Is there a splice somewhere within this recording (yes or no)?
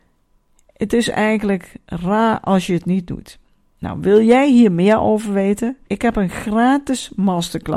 yes